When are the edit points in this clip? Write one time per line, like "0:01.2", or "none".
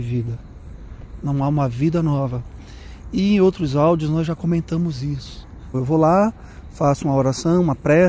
0:05.7

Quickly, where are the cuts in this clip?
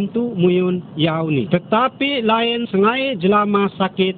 0:01.5

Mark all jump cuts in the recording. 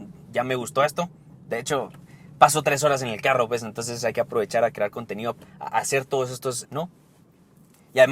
0:05.4
0:06.6

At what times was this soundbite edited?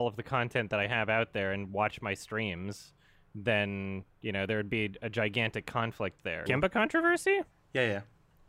0:06.5

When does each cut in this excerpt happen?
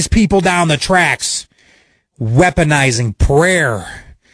none

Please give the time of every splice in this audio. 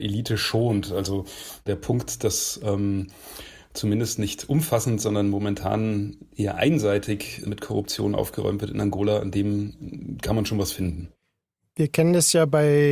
0:07.4

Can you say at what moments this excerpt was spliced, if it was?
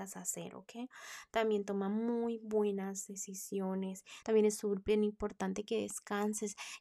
0:04.2

